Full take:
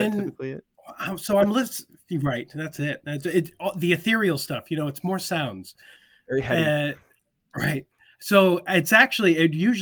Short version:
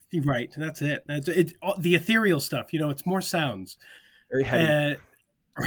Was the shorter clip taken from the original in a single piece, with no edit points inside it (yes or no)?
yes